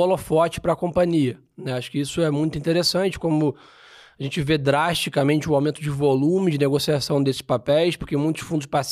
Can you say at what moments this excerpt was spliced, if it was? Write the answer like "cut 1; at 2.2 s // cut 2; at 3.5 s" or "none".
none